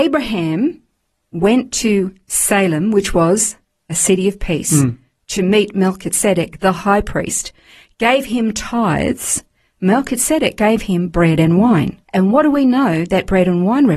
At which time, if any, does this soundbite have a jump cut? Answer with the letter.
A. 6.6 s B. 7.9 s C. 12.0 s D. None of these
C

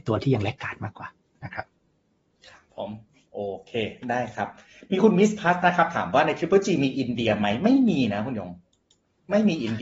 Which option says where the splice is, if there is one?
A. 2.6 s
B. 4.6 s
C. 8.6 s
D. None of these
D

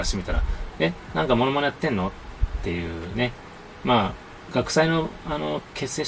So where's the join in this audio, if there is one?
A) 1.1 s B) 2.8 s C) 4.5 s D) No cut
D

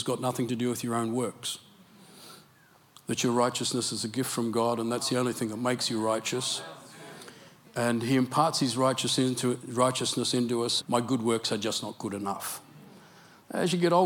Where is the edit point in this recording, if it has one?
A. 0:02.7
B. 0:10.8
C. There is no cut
B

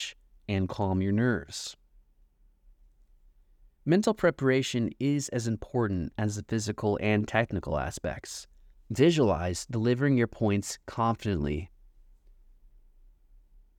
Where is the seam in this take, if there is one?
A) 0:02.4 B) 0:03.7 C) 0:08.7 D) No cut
C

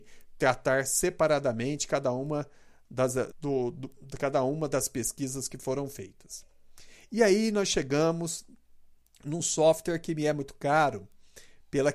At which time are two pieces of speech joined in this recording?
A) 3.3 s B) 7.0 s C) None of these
A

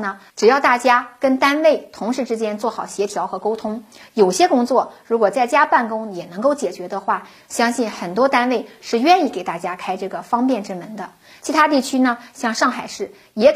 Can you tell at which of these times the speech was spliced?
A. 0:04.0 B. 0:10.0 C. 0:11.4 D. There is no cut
D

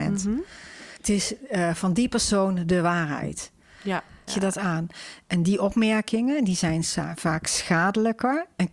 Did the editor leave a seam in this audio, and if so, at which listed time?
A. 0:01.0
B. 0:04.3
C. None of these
B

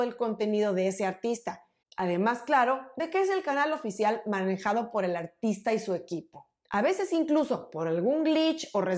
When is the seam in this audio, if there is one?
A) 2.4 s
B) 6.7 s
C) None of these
B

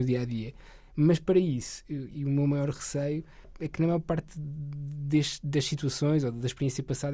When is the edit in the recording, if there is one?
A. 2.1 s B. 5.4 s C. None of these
A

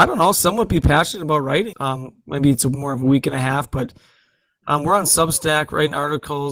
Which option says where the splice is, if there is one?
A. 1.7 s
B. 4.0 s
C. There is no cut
A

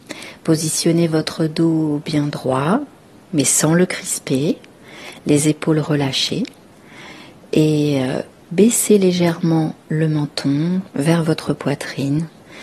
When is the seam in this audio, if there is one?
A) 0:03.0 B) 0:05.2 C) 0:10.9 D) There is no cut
C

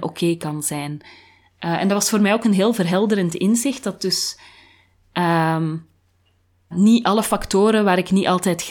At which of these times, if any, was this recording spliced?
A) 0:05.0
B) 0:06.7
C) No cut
B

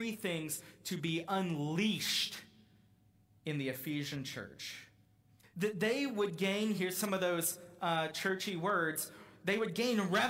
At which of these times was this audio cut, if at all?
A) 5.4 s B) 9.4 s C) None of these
A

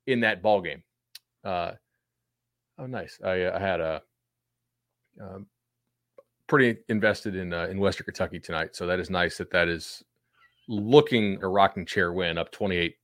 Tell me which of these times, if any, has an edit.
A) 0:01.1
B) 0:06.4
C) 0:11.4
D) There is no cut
C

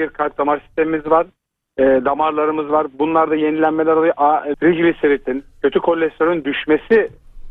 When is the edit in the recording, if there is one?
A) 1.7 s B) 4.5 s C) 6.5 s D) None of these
B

